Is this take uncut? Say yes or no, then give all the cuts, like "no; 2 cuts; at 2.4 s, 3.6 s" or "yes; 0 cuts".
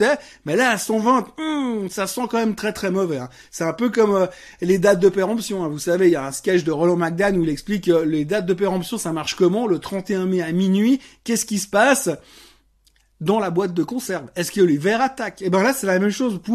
yes; 0 cuts